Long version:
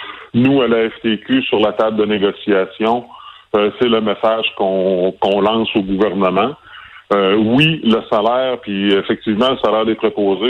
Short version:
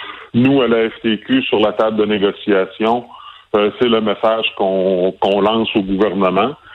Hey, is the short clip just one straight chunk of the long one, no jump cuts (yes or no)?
yes